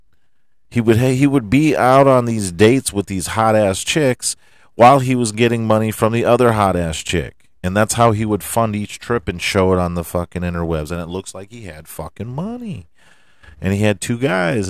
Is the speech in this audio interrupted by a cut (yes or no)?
no